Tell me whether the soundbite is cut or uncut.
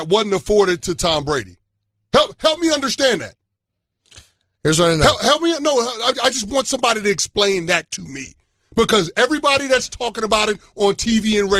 uncut